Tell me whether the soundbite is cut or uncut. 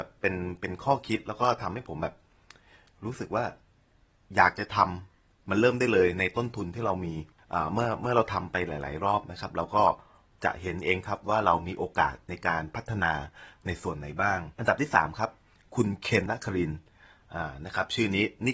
cut